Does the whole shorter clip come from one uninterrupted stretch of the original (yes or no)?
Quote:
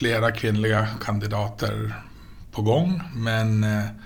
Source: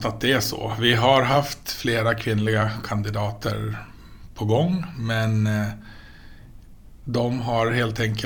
yes